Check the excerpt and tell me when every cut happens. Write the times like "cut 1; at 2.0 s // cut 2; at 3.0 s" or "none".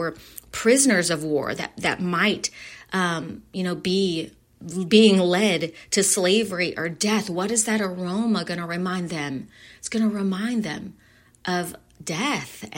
none